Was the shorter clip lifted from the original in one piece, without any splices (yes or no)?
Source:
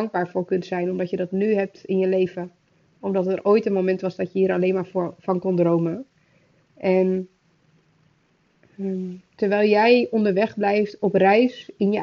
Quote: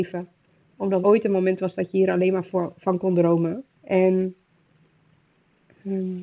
no